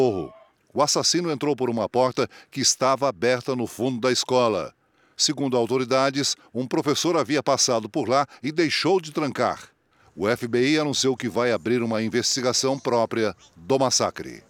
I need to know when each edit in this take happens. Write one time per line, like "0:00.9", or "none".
none